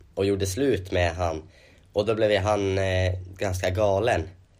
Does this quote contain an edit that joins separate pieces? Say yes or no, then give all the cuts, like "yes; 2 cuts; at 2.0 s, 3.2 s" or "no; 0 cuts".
no; 0 cuts